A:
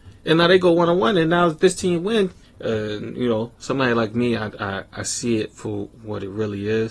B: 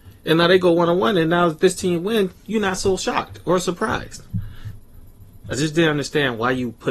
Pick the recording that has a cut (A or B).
A